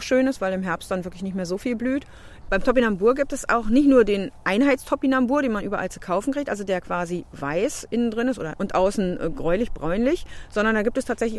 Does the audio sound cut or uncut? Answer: cut